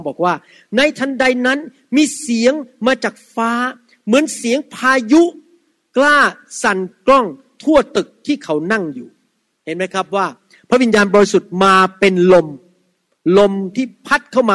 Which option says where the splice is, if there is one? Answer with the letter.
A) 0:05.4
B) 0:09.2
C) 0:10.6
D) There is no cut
D